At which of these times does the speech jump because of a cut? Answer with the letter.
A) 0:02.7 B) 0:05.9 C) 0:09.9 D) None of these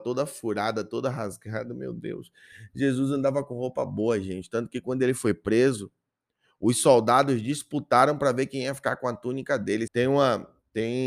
C